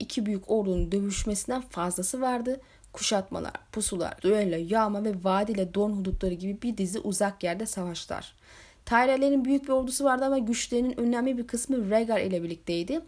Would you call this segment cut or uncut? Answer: cut